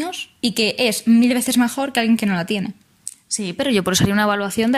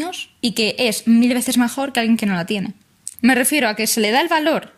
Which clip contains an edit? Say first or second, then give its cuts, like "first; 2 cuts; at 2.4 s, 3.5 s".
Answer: second; 1 cut; at 3.1 s